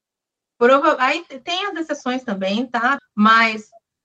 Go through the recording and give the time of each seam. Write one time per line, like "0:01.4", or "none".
0:03.0